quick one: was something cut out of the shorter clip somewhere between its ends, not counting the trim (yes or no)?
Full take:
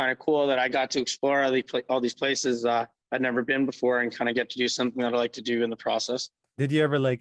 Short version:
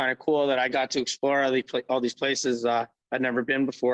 no